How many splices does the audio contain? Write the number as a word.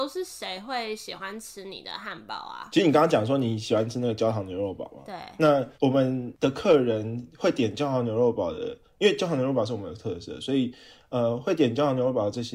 one